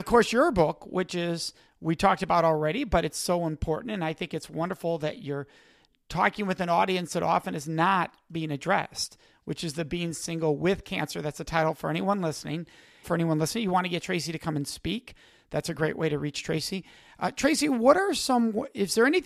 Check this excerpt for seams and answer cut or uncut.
cut